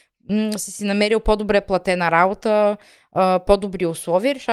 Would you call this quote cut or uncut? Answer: uncut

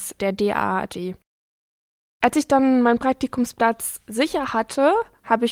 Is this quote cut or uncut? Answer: uncut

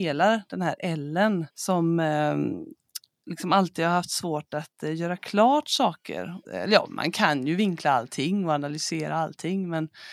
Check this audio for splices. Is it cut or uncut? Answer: cut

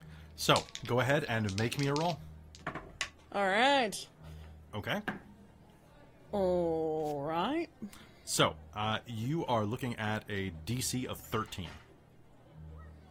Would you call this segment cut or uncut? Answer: uncut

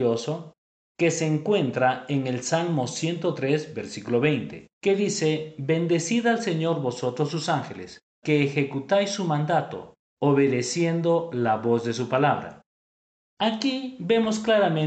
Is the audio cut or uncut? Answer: cut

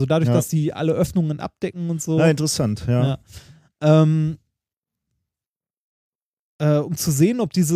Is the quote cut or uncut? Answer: uncut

